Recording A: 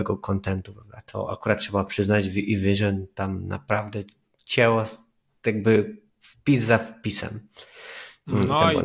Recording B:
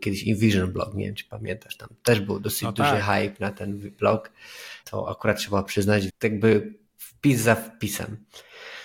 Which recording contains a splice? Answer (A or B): B